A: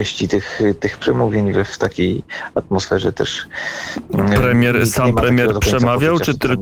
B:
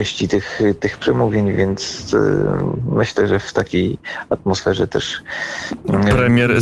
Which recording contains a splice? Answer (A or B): A